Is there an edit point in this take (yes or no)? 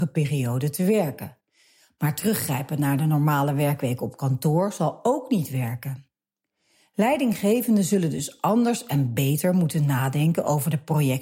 no